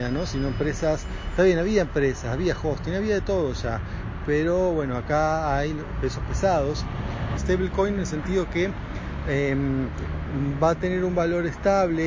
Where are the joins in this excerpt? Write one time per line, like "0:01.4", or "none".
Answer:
0:07.4